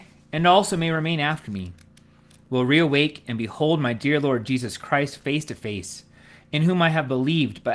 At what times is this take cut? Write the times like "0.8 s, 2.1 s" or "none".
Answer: none